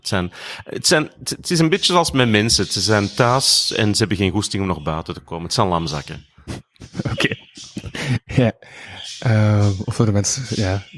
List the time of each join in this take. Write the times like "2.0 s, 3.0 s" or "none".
none